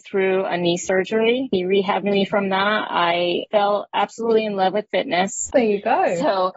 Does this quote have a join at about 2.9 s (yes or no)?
no